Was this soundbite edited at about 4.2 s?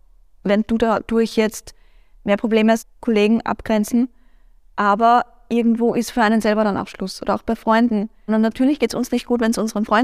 no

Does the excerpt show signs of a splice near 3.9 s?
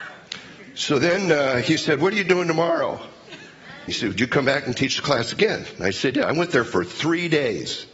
yes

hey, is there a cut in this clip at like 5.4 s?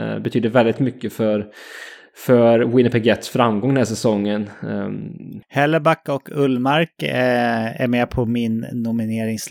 yes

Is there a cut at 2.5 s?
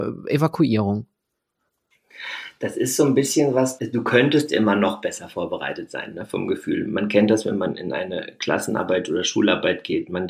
no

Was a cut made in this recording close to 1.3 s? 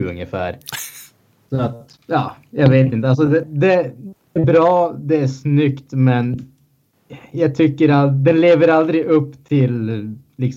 no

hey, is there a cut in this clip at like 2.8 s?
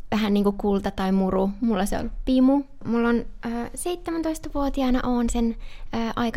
yes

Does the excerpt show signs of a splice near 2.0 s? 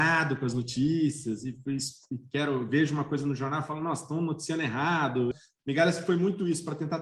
no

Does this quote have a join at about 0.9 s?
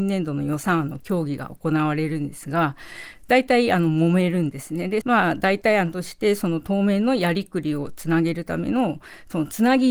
no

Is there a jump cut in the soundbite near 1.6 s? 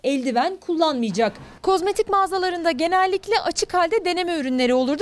yes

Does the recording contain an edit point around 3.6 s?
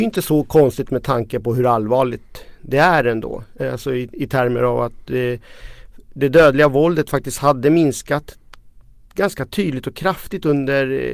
yes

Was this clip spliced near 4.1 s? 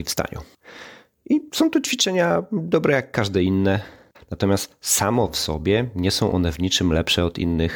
yes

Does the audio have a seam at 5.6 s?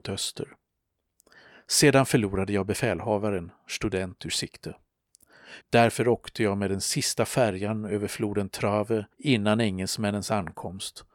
yes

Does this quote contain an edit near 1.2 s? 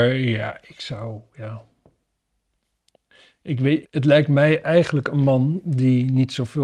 no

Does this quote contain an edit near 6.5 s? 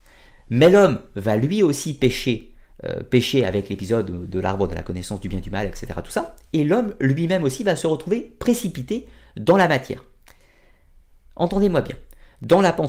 no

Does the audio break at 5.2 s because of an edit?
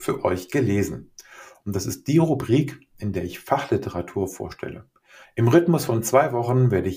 yes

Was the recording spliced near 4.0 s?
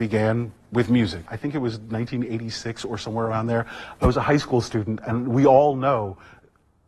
no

